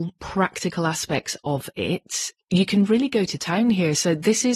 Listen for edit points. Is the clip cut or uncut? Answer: uncut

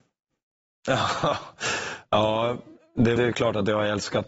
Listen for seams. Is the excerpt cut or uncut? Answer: cut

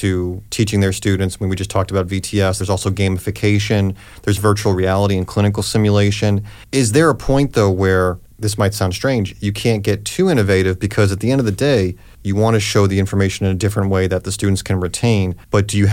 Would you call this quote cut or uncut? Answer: uncut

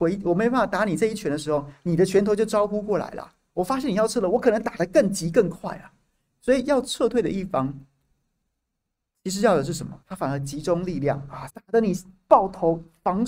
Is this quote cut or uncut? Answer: cut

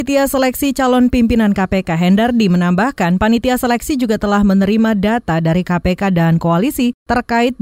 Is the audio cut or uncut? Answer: uncut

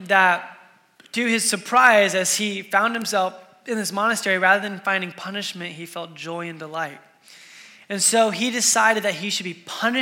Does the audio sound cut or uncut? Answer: cut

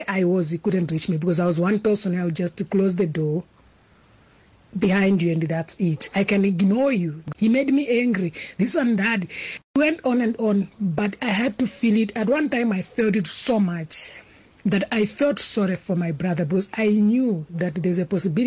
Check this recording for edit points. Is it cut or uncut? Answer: cut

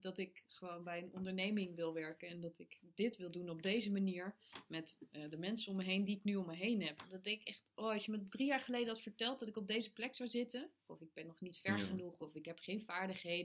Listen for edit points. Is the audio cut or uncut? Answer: cut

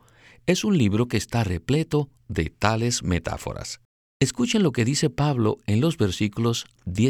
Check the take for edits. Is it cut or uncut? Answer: cut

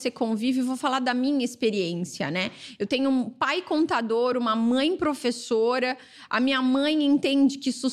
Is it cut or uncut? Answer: uncut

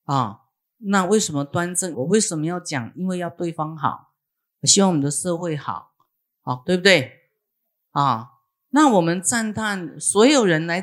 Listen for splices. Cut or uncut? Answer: cut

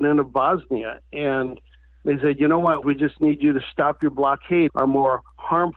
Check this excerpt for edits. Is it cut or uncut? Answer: cut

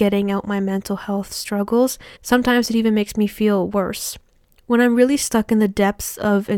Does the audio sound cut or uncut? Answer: cut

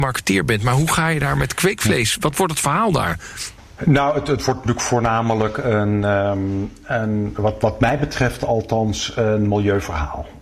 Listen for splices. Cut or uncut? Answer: uncut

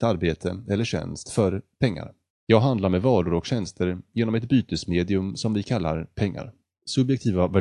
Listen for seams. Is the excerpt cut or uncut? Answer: cut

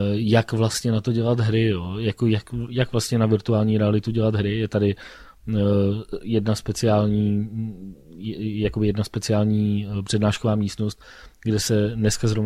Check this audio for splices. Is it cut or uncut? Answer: uncut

